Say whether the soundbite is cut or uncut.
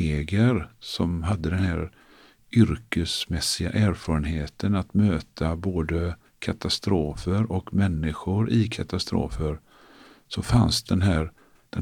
cut